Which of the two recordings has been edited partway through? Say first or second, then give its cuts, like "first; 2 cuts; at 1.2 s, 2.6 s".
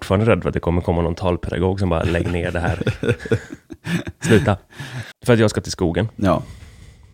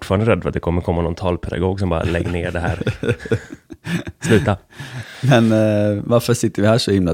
first; 1 cut; at 5.1 s